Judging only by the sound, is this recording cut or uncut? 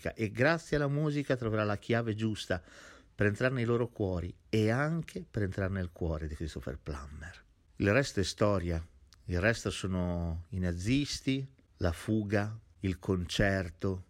uncut